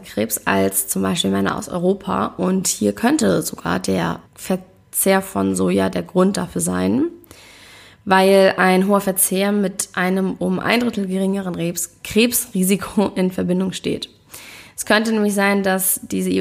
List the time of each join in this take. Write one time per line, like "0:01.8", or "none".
0:04.3

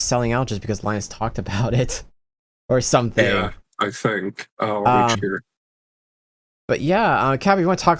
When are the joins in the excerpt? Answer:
0:05.1

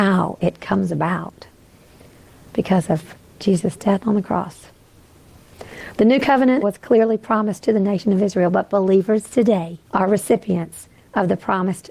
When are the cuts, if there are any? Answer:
0:06.6
0:09.9

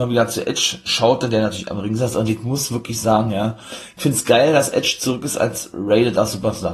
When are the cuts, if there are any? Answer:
none

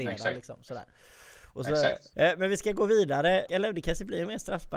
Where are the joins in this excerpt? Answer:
0:02.1
0:03.5

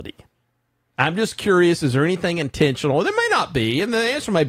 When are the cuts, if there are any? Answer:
none

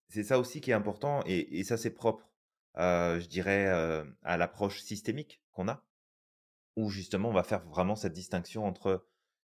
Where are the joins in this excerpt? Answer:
none

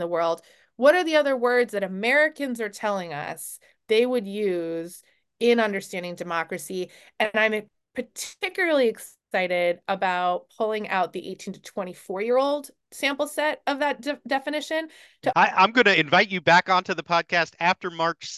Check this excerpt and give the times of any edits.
0:15.3

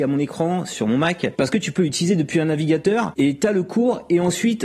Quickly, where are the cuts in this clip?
none

